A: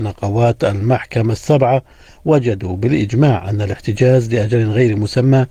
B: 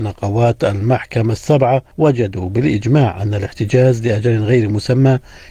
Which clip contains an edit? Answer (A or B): B